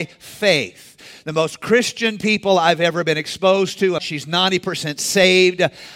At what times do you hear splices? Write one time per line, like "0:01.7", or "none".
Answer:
0:04.0